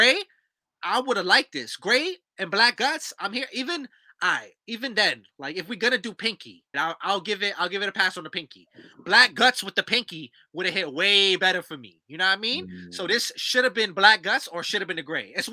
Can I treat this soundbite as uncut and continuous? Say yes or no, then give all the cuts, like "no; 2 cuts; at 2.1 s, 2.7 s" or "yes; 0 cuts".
no; 1 cut; at 6.7 s